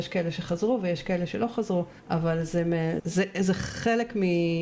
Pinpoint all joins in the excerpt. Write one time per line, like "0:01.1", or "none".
0:02.0
0:03.0